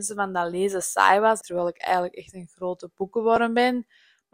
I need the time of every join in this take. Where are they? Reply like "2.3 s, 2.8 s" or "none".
1.4 s

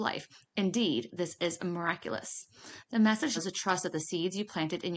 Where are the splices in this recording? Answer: 3.4 s

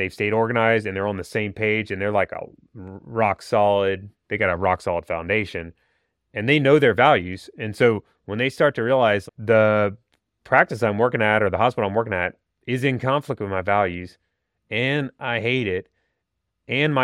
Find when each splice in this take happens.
4.1 s, 9.3 s

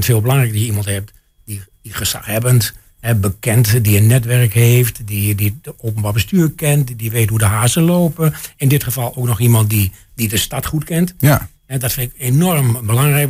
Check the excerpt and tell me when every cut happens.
none

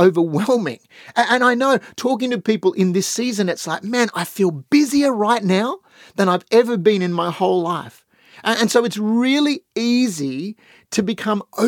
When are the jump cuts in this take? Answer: none

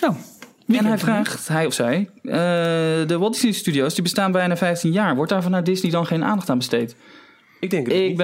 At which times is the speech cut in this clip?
none

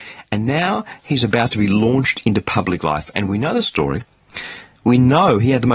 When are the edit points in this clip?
none

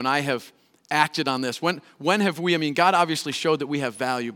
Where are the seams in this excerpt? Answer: none

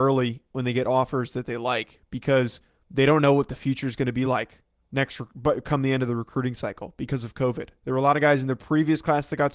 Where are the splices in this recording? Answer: none

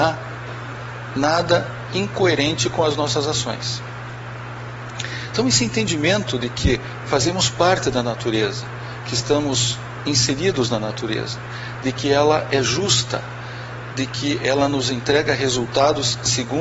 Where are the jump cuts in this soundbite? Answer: none

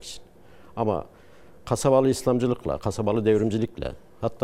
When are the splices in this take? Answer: 2.8 s

